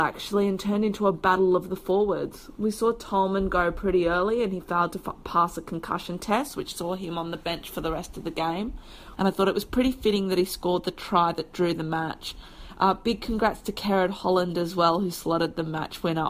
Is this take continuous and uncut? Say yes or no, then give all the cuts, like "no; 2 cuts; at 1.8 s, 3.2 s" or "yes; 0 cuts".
no; 1 cut; at 9.2 s